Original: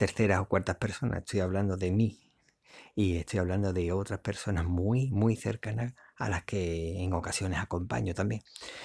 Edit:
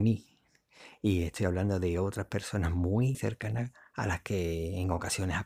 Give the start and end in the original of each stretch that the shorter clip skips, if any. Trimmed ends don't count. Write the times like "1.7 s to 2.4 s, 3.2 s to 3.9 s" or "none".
5.1 s to 5.4 s